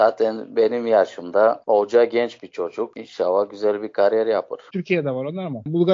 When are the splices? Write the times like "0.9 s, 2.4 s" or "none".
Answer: 4.7 s